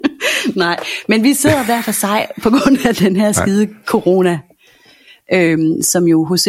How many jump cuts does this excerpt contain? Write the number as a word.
zero